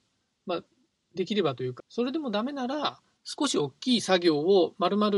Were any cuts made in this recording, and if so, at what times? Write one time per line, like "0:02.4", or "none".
0:01.8
0:03.2